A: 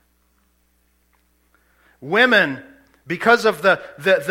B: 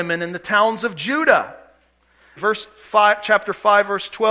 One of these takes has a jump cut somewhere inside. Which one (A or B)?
B